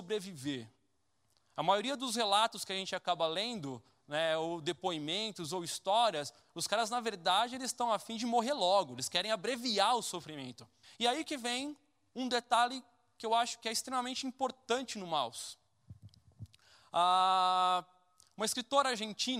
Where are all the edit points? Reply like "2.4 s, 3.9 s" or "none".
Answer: 10.8 s